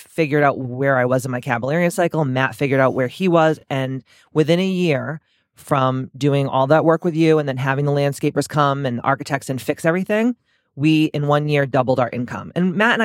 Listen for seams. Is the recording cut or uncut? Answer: uncut